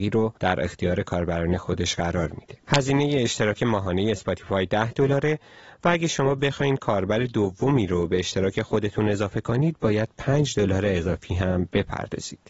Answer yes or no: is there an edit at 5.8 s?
no